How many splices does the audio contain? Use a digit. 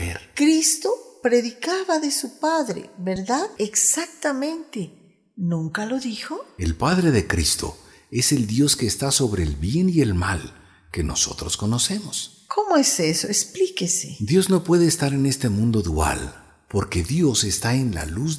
1